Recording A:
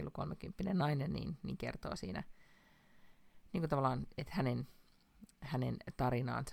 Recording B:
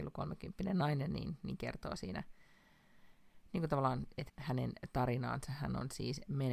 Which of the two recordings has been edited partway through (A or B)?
B